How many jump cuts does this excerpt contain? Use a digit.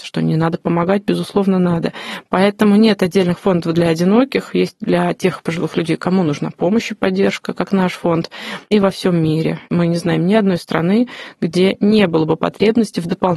0